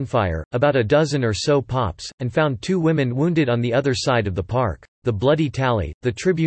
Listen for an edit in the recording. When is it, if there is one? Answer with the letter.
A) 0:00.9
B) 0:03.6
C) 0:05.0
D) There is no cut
C